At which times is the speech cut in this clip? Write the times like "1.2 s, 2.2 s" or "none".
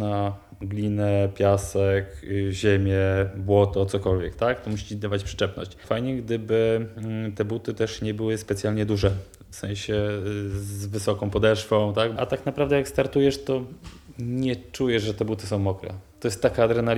12.2 s